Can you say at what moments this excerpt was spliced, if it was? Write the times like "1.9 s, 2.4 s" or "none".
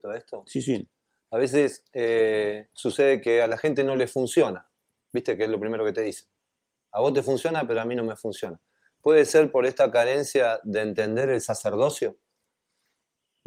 none